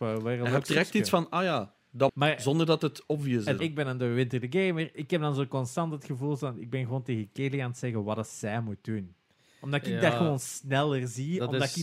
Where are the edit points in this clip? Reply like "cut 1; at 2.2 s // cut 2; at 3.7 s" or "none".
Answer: cut 1; at 2.1 s // cut 2; at 3.6 s // cut 3; at 4.9 s